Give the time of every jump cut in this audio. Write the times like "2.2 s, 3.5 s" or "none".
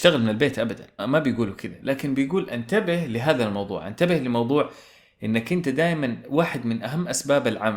1.0 s